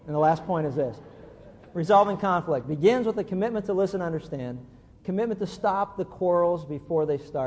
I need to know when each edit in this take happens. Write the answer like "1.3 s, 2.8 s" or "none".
none